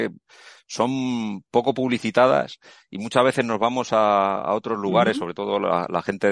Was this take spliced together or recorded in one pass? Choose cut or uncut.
uncut